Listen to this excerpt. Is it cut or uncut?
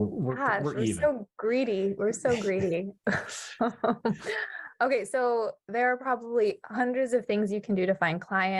uncut